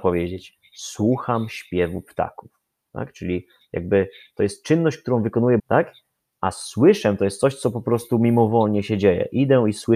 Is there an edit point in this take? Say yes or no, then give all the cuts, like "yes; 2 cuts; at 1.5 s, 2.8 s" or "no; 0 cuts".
yes; 1 cut; at 5.6 s